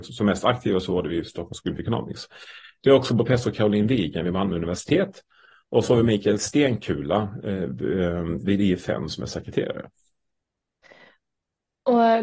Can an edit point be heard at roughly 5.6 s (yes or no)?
no